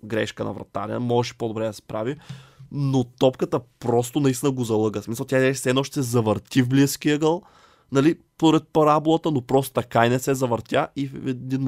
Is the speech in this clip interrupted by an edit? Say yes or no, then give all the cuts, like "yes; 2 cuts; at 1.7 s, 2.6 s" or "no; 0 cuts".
no; 0 cuts